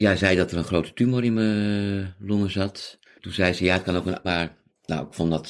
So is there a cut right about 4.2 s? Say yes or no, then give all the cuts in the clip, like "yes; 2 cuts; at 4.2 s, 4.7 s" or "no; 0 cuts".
yes; 1 cut; at 4.2 s